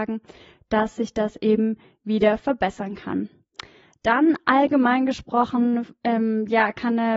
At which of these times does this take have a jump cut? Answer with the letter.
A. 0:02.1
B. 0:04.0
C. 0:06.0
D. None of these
D